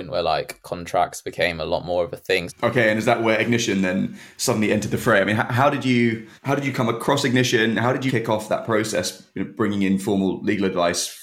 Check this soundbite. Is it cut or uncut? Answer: cut